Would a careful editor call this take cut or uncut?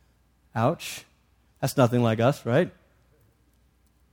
uncut